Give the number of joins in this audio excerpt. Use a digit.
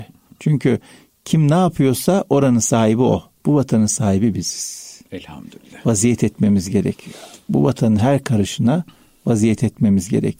1